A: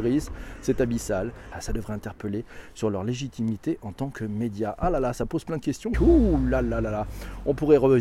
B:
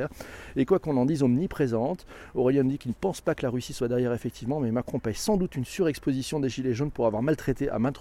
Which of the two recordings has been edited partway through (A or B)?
A